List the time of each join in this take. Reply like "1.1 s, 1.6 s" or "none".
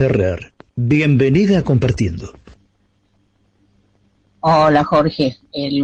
none